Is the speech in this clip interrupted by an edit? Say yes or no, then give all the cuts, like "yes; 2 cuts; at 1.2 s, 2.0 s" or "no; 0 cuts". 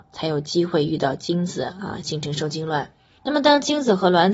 no; 0 cuts